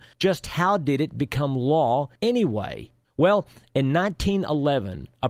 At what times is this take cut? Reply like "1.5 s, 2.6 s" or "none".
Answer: none